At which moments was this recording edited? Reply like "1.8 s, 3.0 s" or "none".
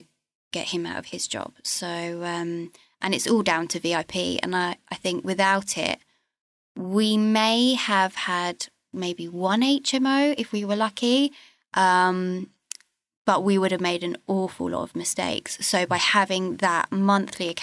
none